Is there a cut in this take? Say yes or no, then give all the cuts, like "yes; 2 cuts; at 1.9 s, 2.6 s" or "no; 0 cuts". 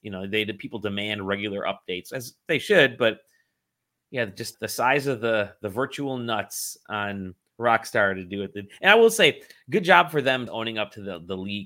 yes; 2 cuts; at 4.5 s, 10.5 s